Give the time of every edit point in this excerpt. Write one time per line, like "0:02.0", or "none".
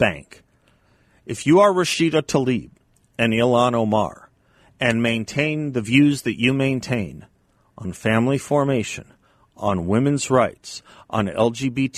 none